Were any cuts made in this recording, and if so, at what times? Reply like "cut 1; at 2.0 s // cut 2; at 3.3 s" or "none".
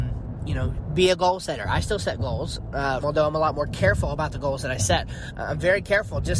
cut 1; at 3.0 s